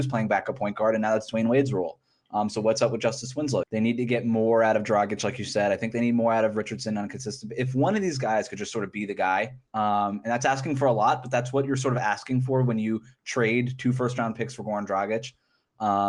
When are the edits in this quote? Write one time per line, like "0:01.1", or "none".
0:03.6
0:09.7